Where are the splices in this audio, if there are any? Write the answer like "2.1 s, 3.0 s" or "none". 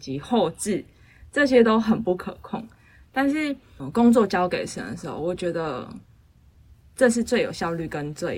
3.8 s